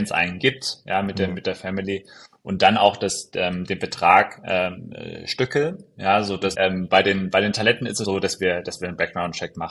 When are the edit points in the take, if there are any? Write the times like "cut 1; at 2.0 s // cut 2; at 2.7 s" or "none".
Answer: cut 1; at 6.5 s // cut 2; at 8.0 s